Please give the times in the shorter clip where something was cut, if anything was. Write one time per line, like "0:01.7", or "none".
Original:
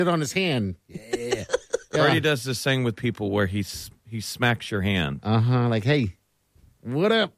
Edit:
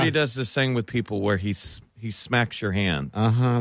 none